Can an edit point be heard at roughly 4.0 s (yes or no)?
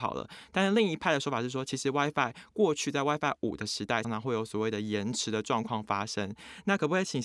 yes